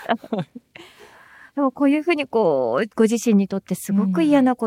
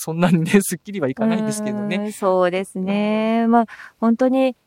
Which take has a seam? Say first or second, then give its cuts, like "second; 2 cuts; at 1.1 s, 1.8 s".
first; 1 cut; at 2.9 s